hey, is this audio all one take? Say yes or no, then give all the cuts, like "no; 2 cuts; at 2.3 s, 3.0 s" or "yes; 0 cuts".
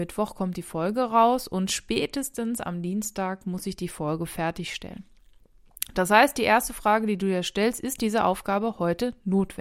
yes; 0 cuts